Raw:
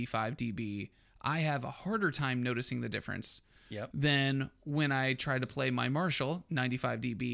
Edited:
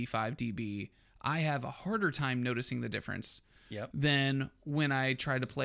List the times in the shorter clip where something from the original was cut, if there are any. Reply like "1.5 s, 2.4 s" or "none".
none